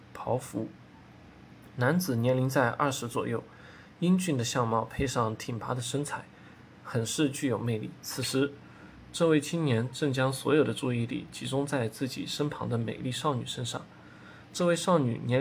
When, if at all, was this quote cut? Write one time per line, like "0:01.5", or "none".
0:08.0